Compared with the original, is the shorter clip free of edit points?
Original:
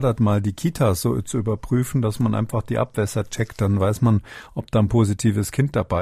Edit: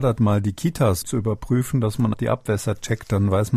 no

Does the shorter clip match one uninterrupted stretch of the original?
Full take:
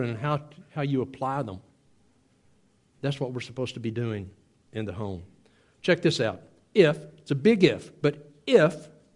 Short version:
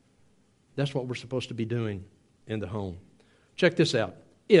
yes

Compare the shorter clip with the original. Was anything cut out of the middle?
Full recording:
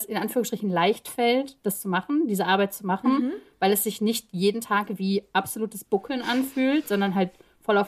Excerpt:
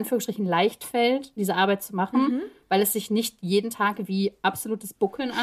yes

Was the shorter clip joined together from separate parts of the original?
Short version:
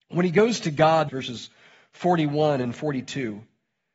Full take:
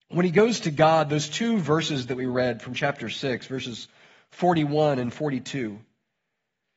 yes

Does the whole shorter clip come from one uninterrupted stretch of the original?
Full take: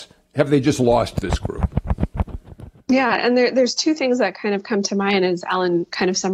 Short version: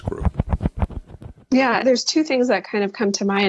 no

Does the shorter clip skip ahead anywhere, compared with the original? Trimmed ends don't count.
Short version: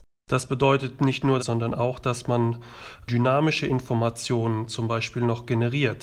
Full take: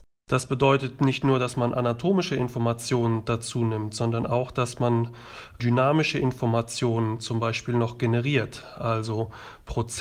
yes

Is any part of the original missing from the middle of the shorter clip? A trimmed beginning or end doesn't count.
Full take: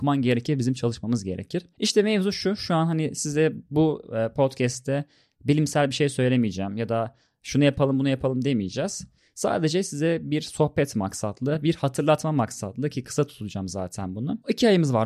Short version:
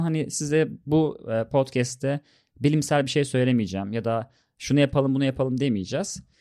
no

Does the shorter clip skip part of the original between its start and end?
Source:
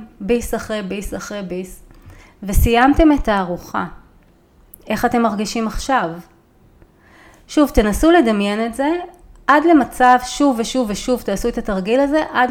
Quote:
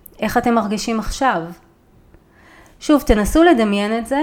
no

